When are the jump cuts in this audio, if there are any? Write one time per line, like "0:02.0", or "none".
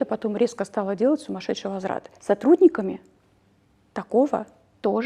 0:02.2